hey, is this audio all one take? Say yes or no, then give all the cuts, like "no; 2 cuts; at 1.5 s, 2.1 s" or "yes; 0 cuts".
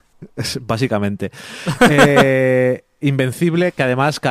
yes; 0 cuts